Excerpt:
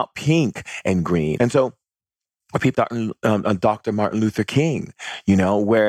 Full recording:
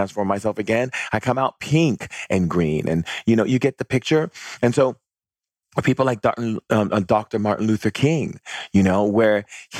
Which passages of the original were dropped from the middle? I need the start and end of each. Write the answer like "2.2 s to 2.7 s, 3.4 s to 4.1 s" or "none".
2.8 s to 4.6 s, 6.0 s to 6.2 s